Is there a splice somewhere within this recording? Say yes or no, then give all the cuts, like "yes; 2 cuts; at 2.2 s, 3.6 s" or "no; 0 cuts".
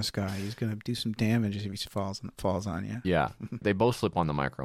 yes; 1 cut; at 3.6 s